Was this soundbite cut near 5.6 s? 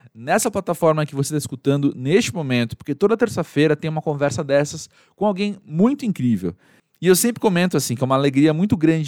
no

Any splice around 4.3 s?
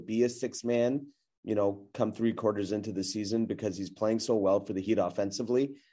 no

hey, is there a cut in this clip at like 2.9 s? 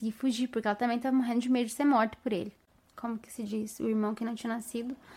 yes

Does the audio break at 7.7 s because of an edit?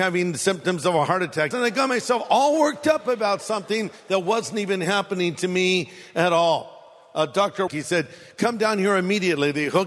yes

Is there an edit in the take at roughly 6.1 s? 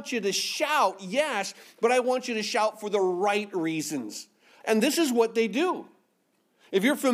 no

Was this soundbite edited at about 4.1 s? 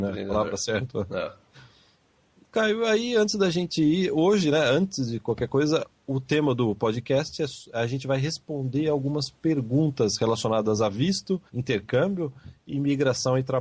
no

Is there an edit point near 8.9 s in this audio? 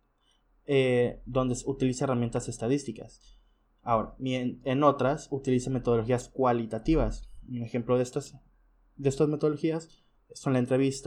no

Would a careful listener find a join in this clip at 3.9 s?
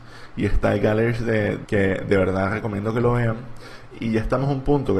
yes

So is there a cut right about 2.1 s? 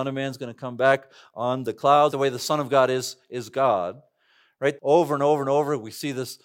yes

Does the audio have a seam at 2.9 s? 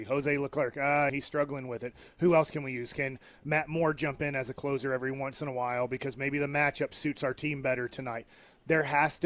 no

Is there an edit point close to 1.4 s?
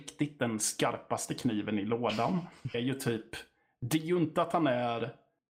no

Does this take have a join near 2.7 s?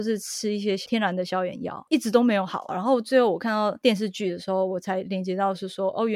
yes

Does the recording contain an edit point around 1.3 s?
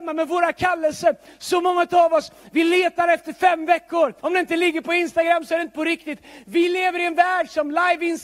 no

